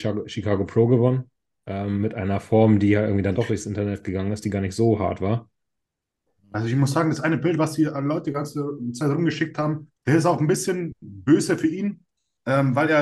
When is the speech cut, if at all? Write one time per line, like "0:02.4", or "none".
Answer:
0:10.0